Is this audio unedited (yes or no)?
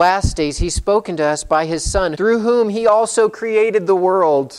no